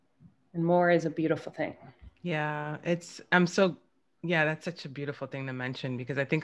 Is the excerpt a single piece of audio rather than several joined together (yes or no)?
yes